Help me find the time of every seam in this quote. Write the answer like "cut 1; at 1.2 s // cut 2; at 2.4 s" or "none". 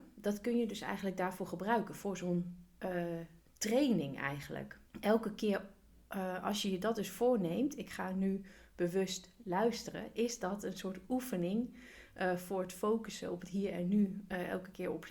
cut 1; at 4.9 s